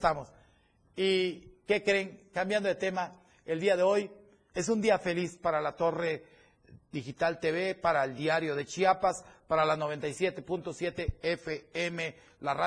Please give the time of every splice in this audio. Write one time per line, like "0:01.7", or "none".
0:04.5

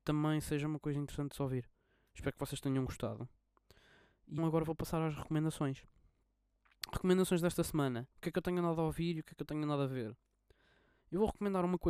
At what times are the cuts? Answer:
0:04.4
0:08.1

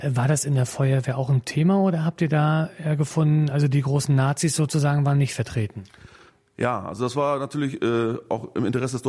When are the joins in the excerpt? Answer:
none

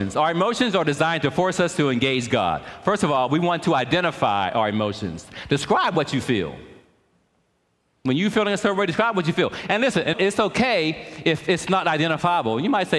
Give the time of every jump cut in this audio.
0:10.1

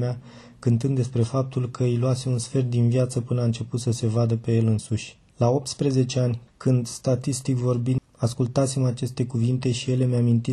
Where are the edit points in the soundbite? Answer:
0:06.5
0:08.0

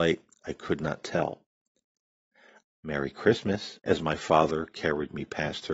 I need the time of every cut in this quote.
0:02.6
0:03.8

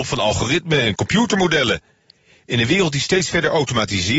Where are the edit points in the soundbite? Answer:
none

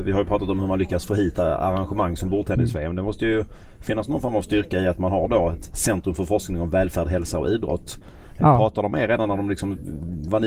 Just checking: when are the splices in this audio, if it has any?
none

